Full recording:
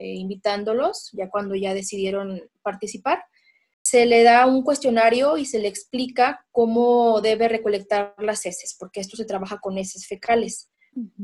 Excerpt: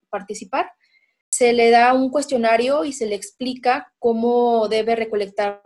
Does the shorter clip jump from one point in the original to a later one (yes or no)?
no